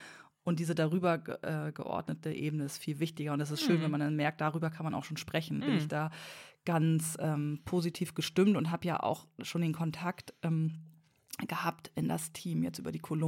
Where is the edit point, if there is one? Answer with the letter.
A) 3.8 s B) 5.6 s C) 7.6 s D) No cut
B